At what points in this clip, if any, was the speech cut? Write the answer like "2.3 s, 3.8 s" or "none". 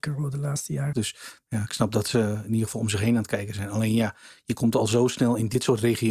0.9 s